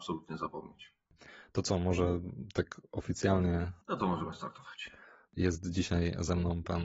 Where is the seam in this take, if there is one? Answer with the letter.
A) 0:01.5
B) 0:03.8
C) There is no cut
B